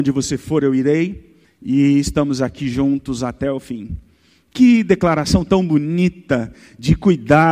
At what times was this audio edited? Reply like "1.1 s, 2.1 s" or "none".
1.4 s